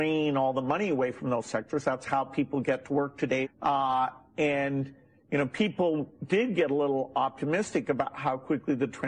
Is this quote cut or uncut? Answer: cut